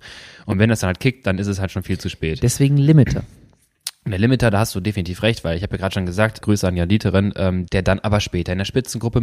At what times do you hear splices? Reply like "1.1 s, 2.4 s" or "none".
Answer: 6.4 s, 7.7 s